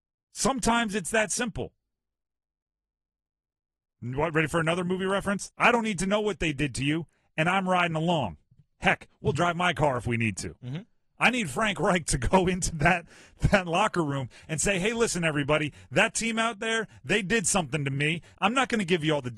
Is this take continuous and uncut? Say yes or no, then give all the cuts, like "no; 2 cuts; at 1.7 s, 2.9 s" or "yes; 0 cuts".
no; 1 cut; at 5.5 s